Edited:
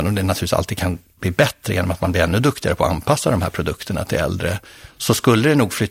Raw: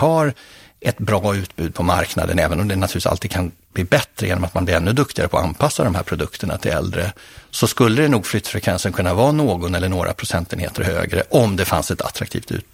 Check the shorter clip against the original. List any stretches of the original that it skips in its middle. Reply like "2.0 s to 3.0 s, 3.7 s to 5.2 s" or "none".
none